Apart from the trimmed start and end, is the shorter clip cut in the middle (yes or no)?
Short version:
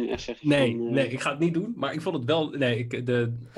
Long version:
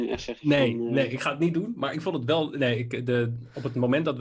no